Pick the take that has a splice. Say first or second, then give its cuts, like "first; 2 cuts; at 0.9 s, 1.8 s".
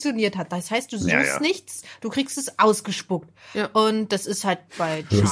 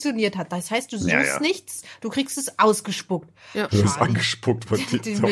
second; 1 cut; at 3.7 s